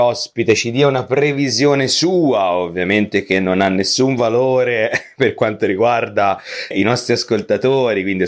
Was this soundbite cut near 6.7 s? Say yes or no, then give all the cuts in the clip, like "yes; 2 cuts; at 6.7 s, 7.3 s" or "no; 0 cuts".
yes; 1 cut; at 6.7 s